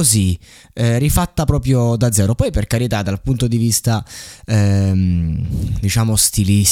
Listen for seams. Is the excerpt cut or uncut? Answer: uncut